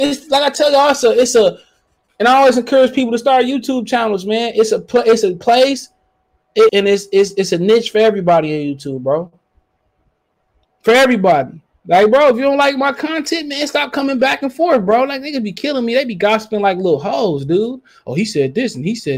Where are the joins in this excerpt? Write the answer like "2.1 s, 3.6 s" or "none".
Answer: 6.7 s